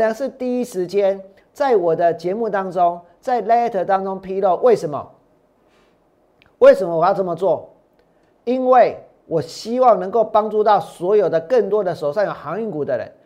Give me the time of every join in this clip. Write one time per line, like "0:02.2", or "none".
none